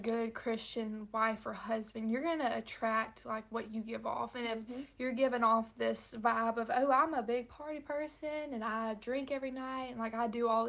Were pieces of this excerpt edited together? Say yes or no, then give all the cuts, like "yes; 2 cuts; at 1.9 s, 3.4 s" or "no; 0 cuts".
no; 0 cuts